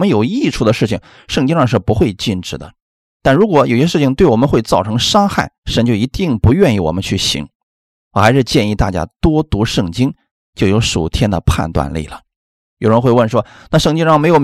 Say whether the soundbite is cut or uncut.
cut